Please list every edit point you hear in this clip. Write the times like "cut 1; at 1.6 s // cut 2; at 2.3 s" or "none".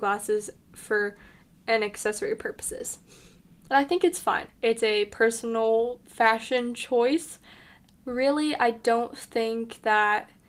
cut 1; at 4.5 s